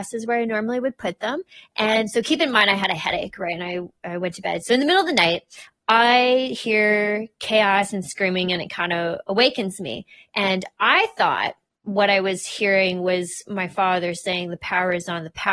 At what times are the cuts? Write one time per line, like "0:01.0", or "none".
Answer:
none